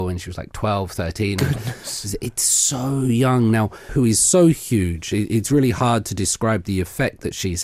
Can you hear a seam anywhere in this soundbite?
yes; 1 cut; at 3.9 s

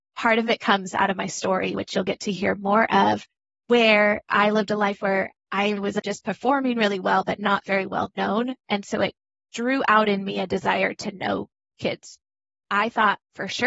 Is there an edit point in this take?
no; 0 cuts

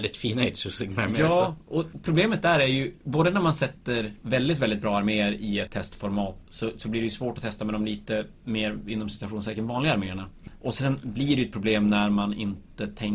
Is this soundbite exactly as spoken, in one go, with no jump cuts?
yes; 0 cuts

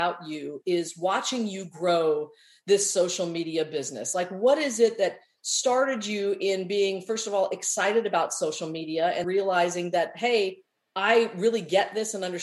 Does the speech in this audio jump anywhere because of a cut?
yes; 2 cuts; at 4.1 s, 9.2 s

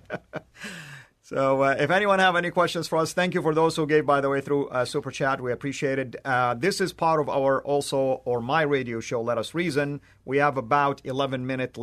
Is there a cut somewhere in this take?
no; 0 cuts

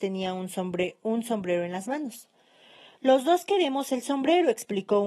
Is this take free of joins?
yes; 0 cuts

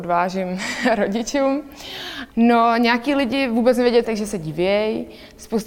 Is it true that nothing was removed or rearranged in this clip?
no; 2 cuts; at 2.3 s, 4.0 s

